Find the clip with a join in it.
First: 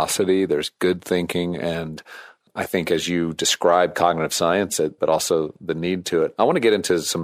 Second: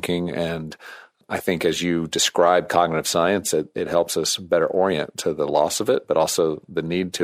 first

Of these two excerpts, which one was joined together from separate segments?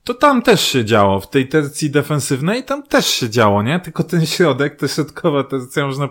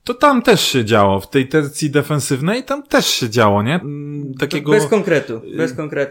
second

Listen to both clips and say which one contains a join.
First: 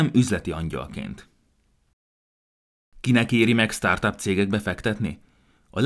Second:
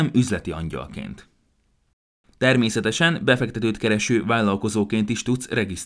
second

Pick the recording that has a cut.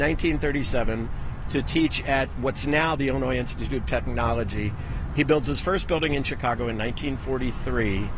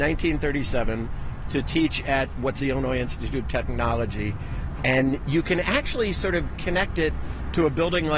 second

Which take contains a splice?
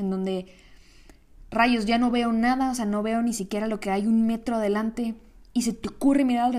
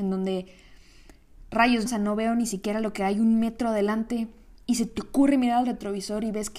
second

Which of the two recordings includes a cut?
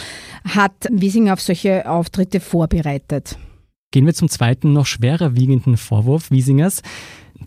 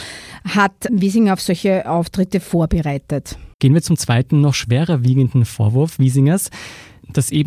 second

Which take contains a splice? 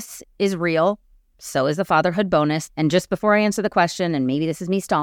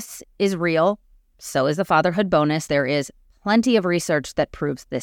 first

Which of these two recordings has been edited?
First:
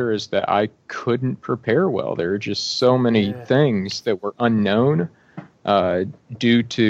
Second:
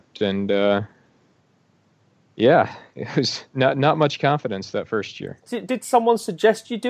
second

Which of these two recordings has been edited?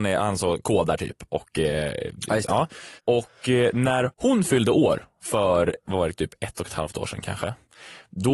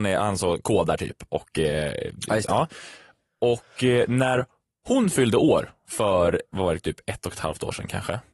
first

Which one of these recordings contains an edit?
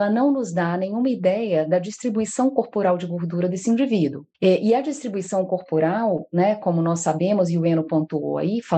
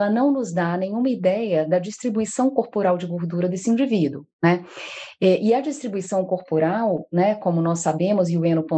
first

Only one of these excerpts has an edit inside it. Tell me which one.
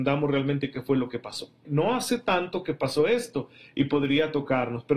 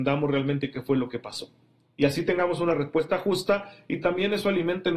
first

